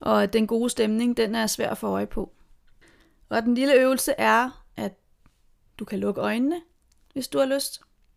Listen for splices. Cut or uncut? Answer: uncut